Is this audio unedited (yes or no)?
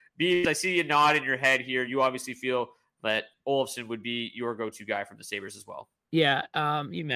yes